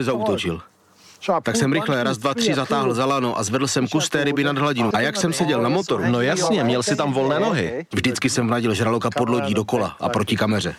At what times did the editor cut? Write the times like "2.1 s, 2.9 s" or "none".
4.9 s, 7.9 s